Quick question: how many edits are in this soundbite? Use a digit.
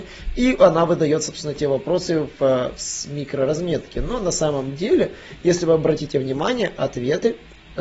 0